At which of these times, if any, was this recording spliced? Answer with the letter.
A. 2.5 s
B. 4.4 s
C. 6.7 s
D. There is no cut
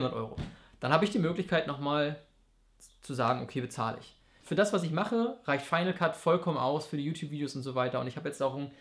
B